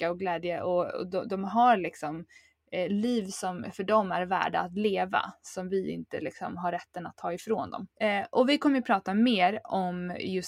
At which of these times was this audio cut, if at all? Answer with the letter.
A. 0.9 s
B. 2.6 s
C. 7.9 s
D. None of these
C